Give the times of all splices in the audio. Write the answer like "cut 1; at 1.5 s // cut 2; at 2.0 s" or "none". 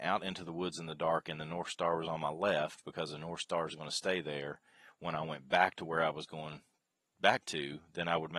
none